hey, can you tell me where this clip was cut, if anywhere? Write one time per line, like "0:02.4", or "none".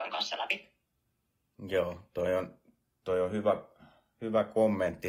none